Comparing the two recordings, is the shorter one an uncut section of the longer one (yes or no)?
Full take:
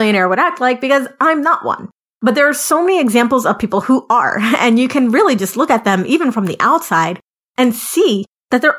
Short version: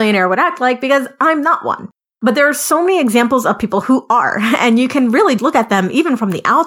no